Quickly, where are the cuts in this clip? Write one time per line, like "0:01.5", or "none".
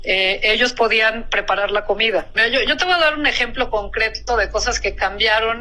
0:02.4